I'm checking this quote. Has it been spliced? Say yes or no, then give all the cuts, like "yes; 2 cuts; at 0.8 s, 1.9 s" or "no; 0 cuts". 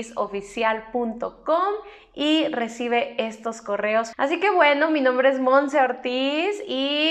yes; 1 cut; at 4.1 s